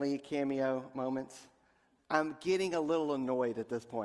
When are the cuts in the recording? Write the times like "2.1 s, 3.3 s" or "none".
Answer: 2.0 s